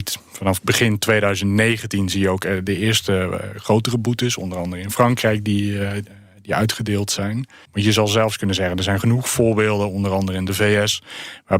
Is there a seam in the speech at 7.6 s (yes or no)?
yes